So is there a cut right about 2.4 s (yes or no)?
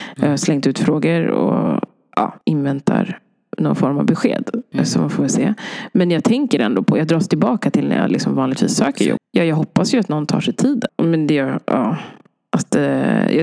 yes